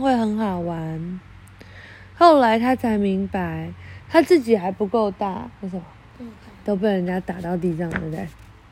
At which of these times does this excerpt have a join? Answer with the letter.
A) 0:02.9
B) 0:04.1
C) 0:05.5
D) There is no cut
C